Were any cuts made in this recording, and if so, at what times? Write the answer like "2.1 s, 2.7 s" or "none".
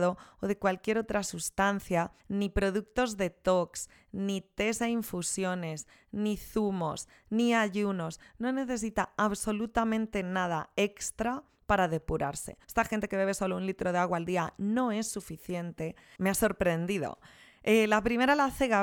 2.2 s, 12.6 s, 16.2 s